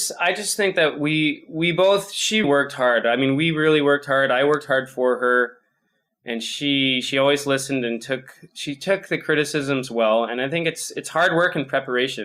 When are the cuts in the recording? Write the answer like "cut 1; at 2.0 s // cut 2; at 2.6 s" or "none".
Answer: cut 1; at 2.4 s